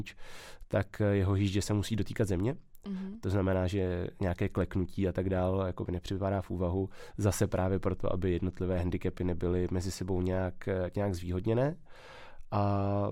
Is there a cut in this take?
no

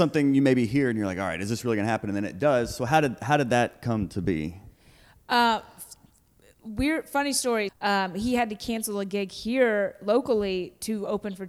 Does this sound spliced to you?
yes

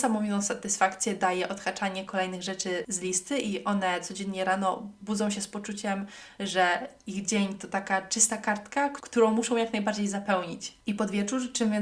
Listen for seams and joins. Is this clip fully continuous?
yes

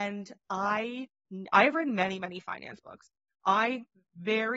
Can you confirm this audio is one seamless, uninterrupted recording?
yes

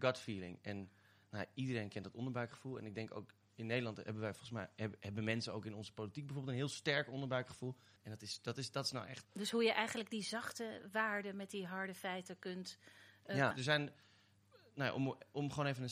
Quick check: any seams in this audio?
yes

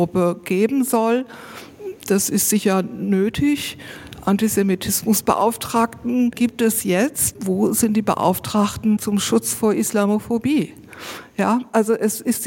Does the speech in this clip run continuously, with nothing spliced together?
yes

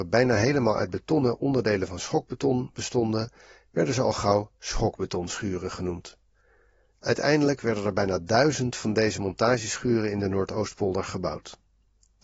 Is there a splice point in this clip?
no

